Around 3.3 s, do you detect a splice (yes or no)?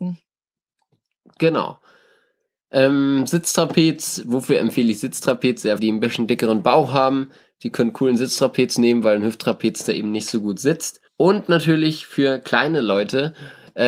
no